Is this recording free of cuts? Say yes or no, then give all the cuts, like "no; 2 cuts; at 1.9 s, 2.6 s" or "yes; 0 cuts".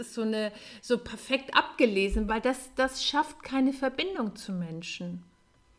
yes; 0 cuts